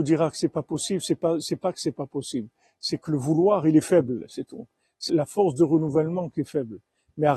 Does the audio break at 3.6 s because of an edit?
no; 1 cut; at 5.1 s

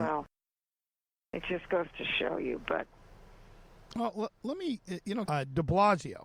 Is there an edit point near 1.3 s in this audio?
no; 1 cut; at 5.3 s

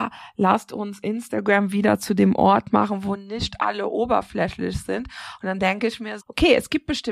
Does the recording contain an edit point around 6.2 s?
yes; 1 cut; at 6.2 s

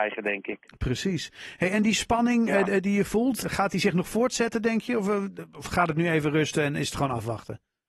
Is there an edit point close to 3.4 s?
yes; 1 cut; at 3.4 s

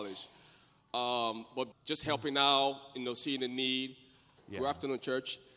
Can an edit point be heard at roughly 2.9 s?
no; 2 cuts; at 1.7 s, 4.4 s

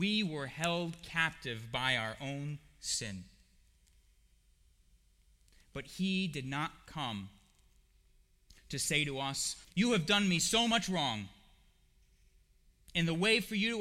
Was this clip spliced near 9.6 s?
yes; 1 cut; at 9.6 s

